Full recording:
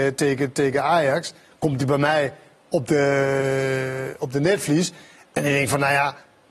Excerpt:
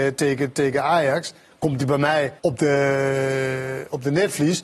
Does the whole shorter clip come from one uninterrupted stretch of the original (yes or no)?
no